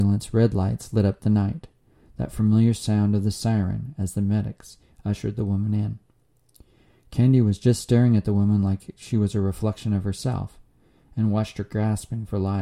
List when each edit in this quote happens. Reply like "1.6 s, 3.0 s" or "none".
none